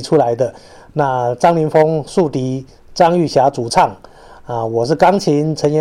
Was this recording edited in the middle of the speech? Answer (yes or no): no